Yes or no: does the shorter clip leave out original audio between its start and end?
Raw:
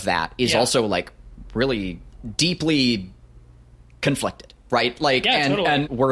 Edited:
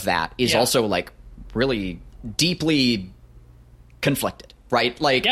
no